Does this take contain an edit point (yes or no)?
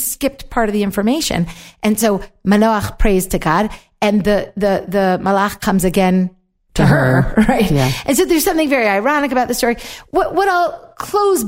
no